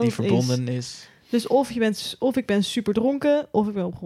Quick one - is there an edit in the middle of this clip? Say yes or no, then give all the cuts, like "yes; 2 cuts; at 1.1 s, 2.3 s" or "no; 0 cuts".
no; 0 cuts